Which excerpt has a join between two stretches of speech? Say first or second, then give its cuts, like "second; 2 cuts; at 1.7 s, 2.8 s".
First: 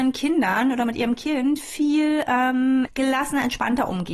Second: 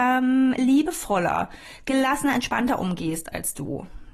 first; 1 cut; at 2.9 s